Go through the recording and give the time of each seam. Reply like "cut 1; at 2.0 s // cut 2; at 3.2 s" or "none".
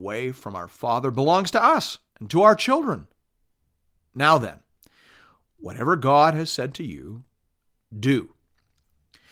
cut 1; at 2.1 s